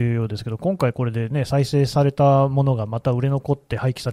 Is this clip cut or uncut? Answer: uncut